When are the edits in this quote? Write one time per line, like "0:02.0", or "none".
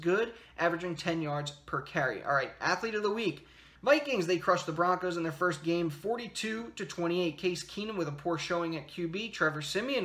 0:03.8